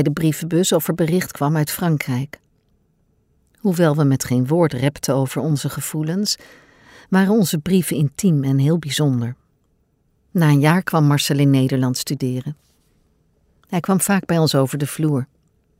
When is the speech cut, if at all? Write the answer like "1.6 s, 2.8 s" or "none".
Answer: none